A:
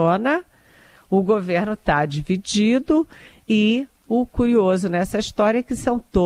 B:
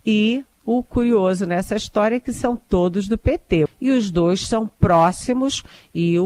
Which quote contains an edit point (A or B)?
B